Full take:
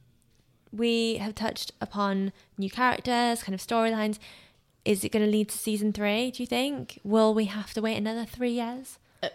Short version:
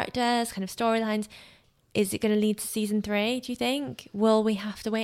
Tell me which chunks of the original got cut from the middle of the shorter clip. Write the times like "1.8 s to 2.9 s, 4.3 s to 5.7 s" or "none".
none